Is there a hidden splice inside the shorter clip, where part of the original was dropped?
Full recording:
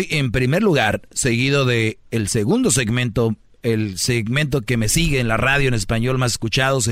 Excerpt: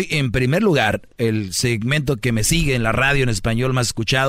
yes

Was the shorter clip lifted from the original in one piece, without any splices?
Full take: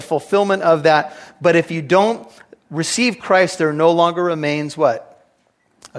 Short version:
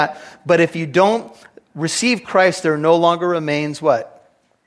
yes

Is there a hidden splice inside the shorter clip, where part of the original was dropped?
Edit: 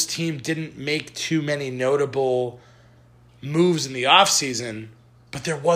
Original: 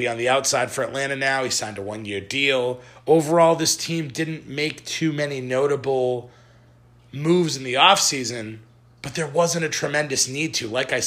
no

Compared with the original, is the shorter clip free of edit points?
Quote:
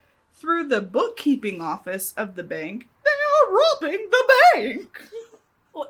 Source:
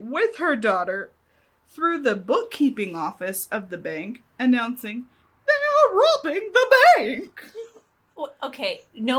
no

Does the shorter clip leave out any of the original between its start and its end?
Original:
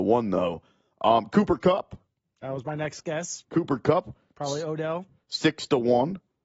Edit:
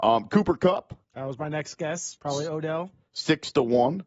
yes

